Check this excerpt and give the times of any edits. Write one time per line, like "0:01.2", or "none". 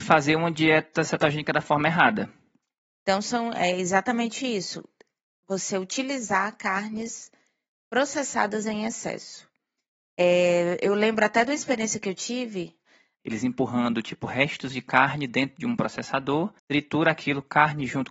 0:13.1
0:16.6